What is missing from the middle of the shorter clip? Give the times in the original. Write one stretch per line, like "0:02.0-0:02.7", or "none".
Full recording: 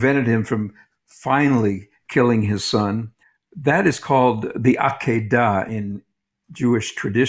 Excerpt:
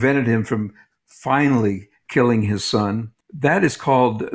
0:03.2-0:03.4